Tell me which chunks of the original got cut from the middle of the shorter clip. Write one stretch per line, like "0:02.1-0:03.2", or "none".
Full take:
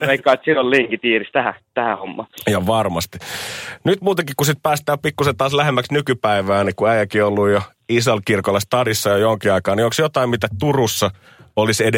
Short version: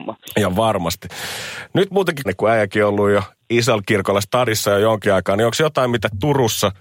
0:04.4-0:06.6